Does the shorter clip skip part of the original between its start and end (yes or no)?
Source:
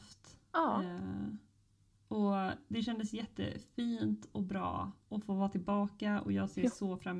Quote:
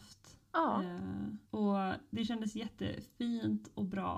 yes